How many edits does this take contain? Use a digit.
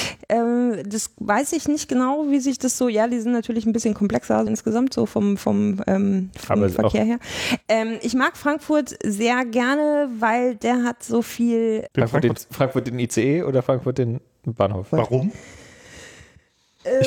3